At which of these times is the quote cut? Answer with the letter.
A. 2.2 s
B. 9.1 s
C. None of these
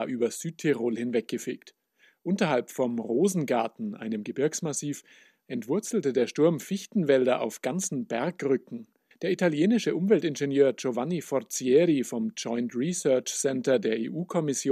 B